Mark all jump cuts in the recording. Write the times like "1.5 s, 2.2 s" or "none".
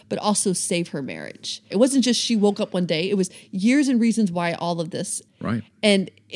1.7 s, 5.3 s